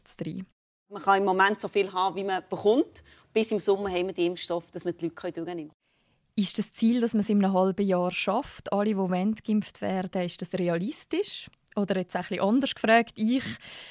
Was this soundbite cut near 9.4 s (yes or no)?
no